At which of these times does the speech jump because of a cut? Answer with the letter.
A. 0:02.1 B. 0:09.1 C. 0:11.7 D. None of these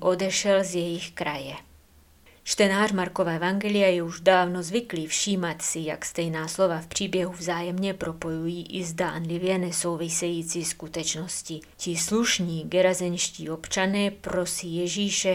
C